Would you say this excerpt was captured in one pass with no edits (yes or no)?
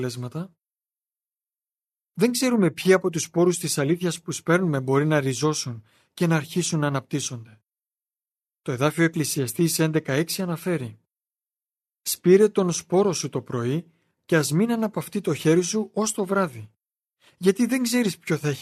yes